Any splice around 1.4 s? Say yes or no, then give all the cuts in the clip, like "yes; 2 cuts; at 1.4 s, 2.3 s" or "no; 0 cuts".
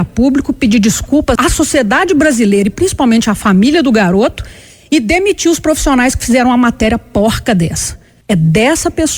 yes; 2 cuts; at 1.4 s, 8.2 s